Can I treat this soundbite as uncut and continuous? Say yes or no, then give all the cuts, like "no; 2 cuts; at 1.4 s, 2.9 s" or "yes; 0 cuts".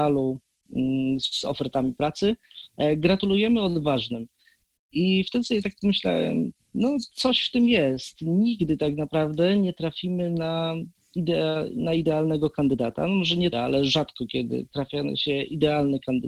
no; 1 cut; at 13.5 s